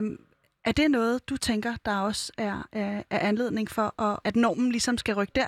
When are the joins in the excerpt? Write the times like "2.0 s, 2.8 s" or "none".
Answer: 4.2 s